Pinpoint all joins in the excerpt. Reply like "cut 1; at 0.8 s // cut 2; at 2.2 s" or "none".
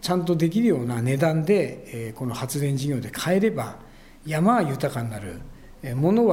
none